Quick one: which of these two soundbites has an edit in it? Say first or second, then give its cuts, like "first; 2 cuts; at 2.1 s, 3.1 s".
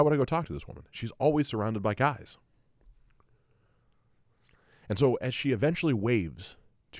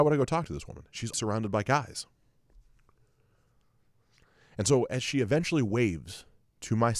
second; 1 cut; at 1.1 s